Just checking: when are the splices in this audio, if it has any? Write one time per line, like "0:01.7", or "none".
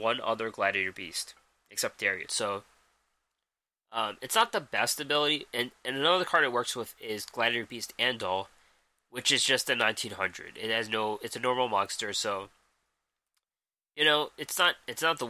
0:02.3